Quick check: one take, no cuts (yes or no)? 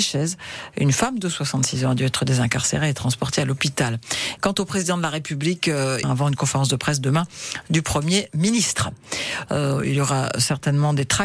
no